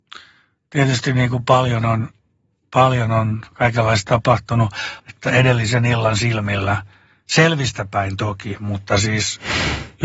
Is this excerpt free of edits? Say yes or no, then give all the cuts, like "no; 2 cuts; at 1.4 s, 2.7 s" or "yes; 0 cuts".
no; 1 cut; at 5.0 s